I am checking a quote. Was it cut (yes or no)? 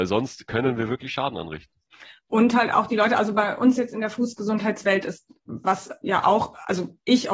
no